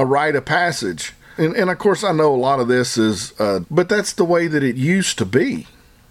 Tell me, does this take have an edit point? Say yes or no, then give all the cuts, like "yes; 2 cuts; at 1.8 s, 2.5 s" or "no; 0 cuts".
yes; 2 cuts; at 1.4 s, 3.6 s